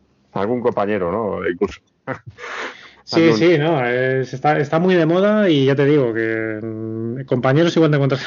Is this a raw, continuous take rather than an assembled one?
yes; 0 cuts

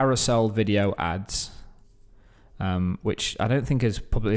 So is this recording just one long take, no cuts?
yes; 0 cuts

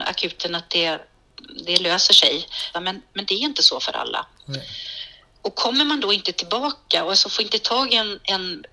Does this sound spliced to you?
yes; 1 cut; at 2.7 s

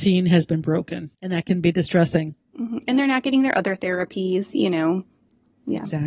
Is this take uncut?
no; 1 cut; at 1.1 s

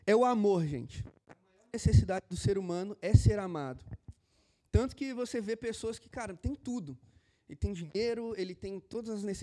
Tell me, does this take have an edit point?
no; 0 cuts

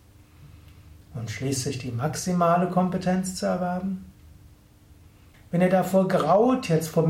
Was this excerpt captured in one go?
no; 1 cut; at 5.3 s

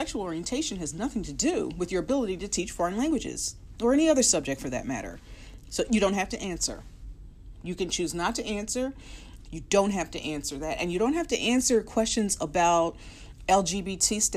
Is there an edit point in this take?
yes; 1 cut; at 9.5 s

